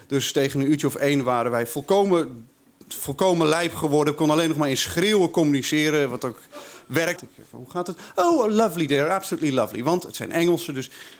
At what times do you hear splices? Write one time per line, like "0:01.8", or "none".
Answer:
0:07.2